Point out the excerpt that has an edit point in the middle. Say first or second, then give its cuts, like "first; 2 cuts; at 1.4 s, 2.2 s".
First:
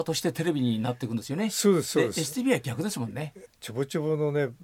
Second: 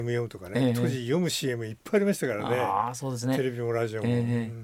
first; 1 cut; at 3.5 s